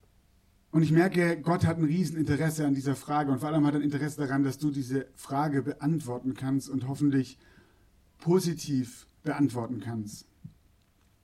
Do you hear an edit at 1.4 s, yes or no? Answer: no